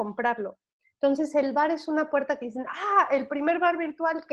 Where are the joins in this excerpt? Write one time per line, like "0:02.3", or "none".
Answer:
none